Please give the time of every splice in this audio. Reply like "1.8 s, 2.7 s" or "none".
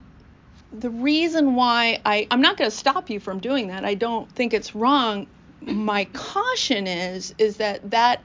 2.3 s